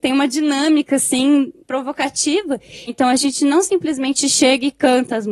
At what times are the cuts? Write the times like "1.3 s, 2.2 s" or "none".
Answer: 1.6 s, 2.9 s